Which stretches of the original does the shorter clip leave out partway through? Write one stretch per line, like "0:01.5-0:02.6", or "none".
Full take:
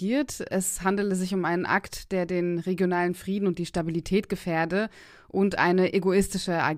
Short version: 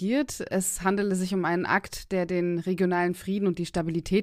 none